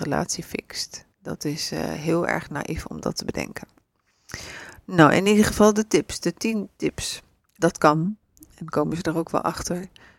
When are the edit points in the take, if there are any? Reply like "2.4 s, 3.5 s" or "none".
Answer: 1.1 s, 7.6 s